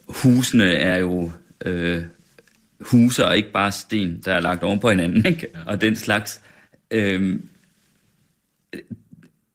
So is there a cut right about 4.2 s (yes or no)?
no